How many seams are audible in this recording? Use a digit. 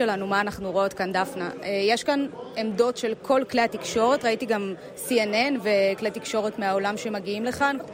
0